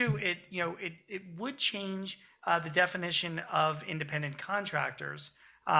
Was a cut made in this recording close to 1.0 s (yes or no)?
no